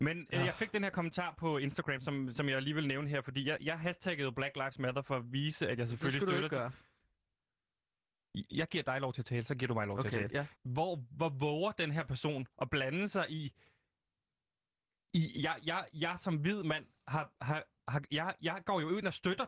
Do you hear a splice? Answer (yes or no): yes